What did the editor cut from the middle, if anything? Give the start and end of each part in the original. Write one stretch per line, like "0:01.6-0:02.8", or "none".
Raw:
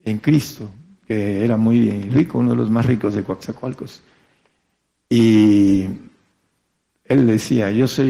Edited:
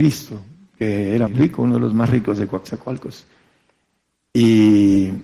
0:01.6-0:02.0